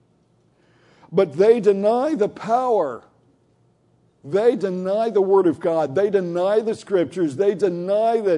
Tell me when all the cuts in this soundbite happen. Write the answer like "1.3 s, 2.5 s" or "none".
none